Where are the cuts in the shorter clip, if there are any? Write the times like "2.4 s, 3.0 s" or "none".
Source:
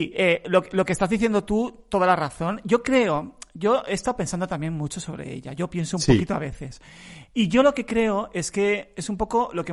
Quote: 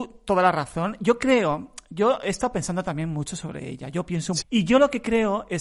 4.4 s